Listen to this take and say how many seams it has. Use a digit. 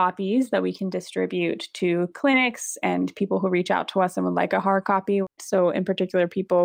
1